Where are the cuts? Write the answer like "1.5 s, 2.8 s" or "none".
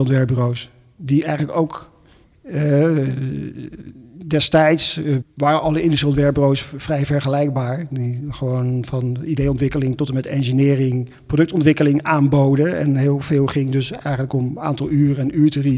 5.2 s